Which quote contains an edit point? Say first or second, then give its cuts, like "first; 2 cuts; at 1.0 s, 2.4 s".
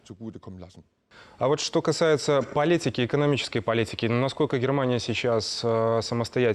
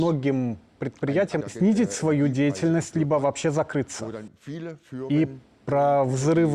second; 1 cut; at 1.4 s